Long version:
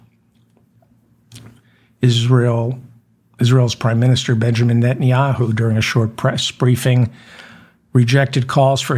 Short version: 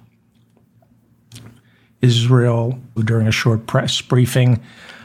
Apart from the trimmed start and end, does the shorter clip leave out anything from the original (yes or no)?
yes